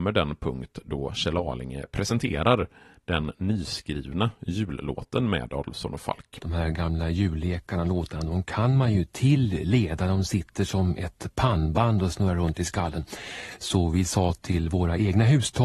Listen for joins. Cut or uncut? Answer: uncut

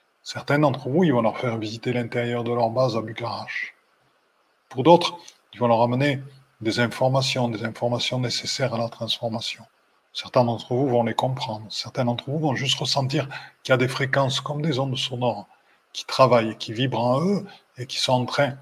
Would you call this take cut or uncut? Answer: uncut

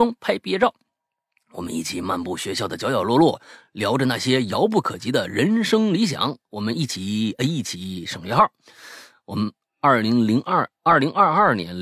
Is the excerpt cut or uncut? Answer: uncut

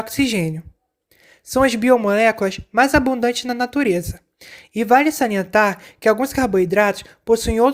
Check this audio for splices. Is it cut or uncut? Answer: uncut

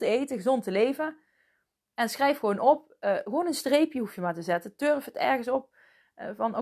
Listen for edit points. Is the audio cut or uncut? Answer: uncut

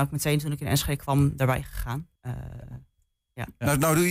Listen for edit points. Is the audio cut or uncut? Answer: cut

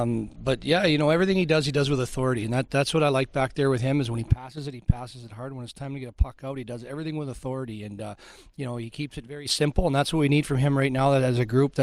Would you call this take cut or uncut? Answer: uncut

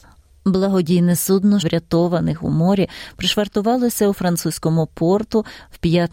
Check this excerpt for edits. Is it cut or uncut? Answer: cut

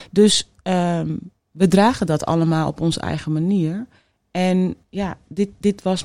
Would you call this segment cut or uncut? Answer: cut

